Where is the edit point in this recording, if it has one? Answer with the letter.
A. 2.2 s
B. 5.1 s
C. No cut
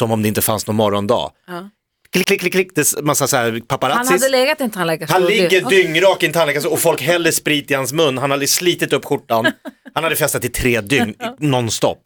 A